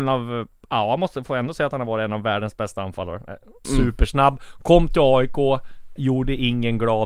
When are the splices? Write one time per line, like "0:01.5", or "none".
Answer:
0:03.6
0:06.0